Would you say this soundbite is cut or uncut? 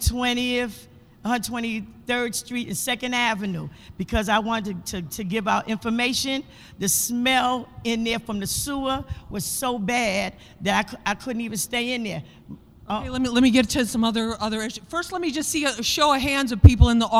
uncut